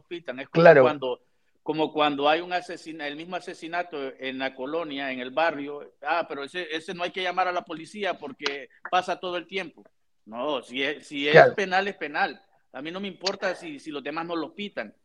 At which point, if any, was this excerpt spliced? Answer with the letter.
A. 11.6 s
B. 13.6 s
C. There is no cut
C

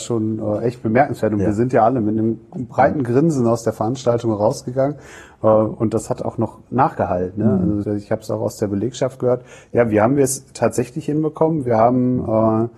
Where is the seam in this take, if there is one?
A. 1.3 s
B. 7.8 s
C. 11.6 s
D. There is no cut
B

